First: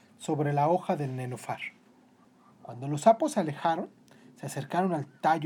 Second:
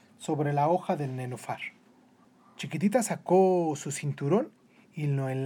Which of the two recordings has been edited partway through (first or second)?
first